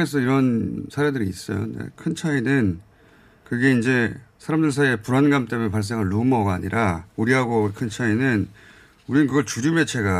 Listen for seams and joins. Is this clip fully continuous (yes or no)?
no